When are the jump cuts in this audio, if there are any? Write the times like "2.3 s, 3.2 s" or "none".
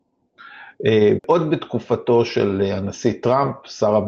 1.2 s